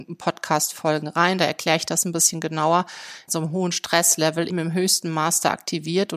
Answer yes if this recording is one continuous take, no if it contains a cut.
no